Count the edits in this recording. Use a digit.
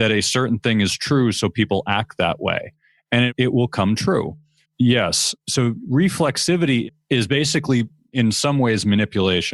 1